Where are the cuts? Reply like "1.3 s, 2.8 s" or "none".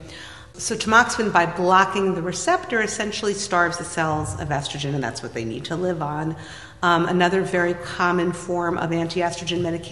none